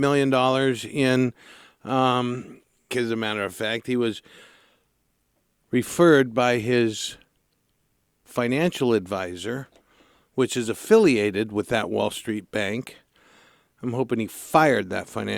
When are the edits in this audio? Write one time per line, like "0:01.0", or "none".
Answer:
0:02.9